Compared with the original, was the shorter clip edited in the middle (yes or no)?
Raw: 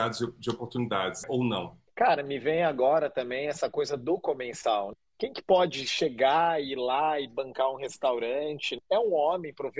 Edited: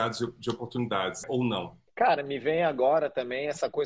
no